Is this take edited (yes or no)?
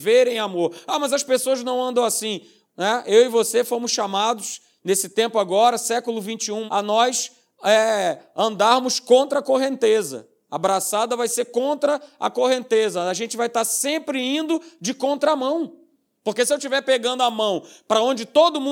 yes